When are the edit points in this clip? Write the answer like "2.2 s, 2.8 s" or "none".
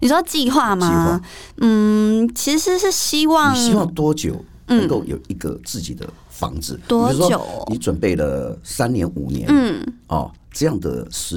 none